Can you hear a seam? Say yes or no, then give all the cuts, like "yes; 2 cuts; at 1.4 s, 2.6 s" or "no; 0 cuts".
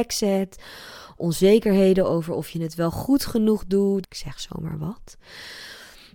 yes; 2 cuts; at 1.2 s, 4.0 s